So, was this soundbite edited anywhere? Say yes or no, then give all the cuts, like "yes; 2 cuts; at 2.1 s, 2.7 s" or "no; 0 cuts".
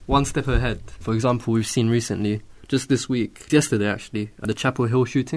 yes; 1 cut; at 3.5 s